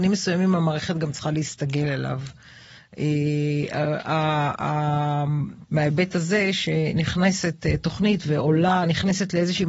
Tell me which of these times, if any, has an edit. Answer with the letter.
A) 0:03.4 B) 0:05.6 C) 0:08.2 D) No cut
B